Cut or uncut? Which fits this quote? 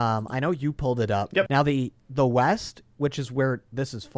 cut